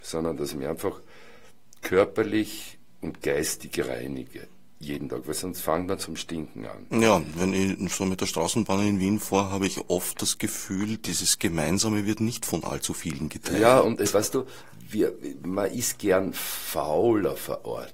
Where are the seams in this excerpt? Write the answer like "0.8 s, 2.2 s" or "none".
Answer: none